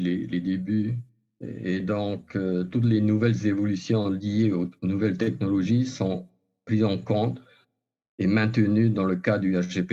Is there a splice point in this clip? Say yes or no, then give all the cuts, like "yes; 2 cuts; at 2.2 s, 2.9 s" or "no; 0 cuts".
no; 0 cuts